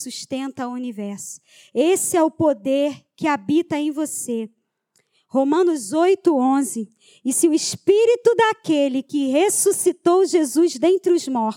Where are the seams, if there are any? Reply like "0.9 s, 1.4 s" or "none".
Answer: none